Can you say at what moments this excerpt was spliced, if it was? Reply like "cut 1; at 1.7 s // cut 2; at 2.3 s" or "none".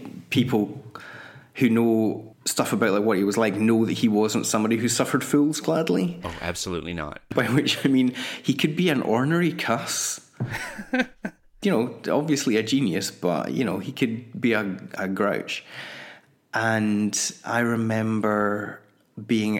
none